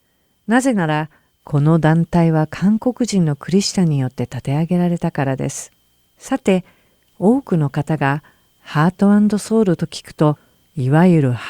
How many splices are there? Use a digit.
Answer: 1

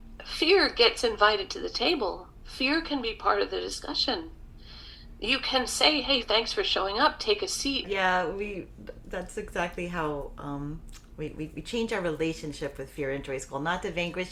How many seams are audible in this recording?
2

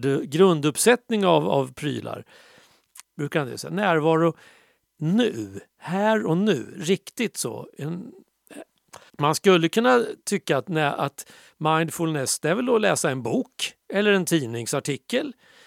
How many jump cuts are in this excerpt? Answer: 3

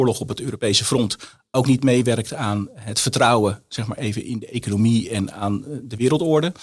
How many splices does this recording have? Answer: 0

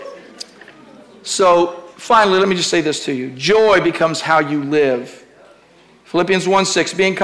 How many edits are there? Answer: 0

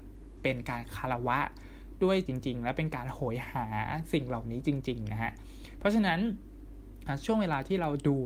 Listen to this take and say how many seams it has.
1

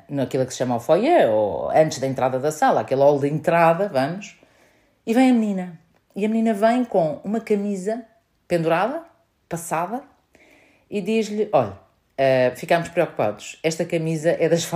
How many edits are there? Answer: 0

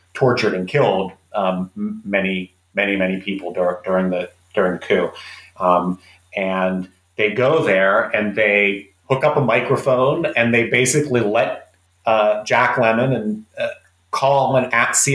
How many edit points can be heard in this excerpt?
0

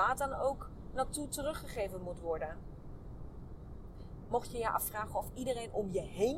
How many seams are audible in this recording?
1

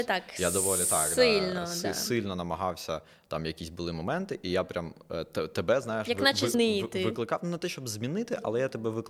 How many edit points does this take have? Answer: 1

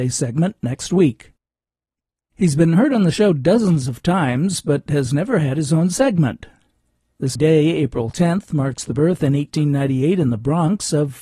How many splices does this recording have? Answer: 1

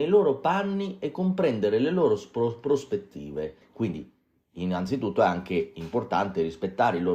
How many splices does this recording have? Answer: 1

